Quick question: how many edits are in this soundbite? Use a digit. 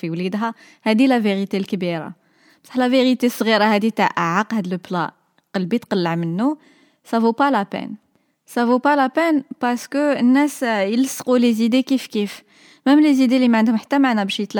0